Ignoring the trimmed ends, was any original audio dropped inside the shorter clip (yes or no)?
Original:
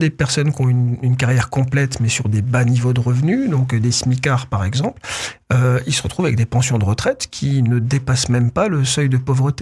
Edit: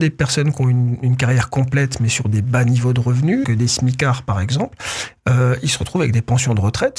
yes